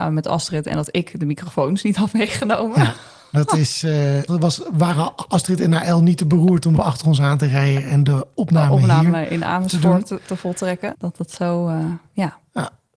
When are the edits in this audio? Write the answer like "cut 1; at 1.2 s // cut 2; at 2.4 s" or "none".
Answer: cut 1; at 4.3 s // cut 2; at 6.8 s // cut 3; at 10.9 s